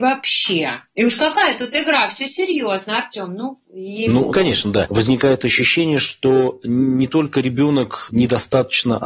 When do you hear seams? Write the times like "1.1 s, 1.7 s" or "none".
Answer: 4.9 s